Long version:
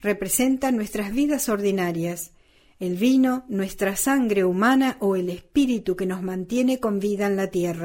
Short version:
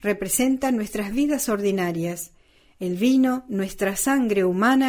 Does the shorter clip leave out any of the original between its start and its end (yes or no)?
no